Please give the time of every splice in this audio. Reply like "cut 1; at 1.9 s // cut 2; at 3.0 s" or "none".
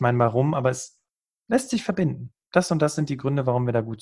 none